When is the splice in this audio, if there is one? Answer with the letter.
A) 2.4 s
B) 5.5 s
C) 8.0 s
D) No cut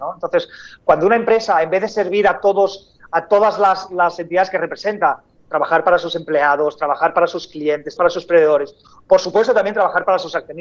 C